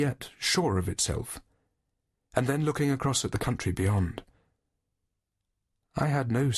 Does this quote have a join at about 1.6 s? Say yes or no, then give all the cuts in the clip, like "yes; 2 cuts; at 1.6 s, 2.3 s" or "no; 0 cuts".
no; 0 cuts